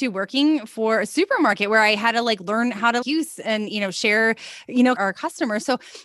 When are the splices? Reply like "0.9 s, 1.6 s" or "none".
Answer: 3.0 s, 5.0 s